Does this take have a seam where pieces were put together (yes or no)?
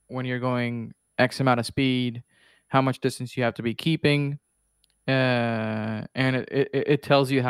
no